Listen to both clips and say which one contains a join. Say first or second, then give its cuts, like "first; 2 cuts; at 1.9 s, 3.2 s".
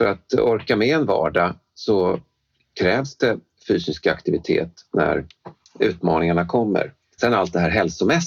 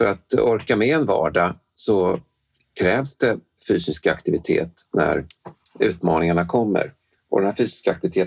first; 1 cut; at 7.2 s